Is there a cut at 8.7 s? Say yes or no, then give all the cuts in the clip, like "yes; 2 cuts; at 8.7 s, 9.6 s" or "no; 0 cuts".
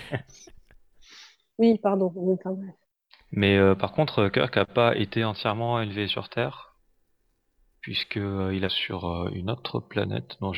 yes; 1 cut; at 8.7 s